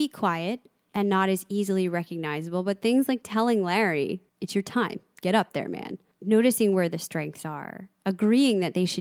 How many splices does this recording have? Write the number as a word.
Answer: one